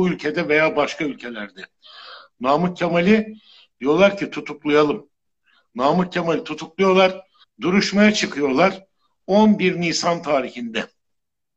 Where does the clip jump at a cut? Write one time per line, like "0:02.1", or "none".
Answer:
0:07.4